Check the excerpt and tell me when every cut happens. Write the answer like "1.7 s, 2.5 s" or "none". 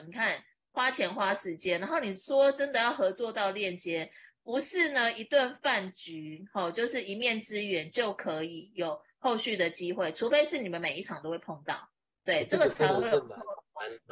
none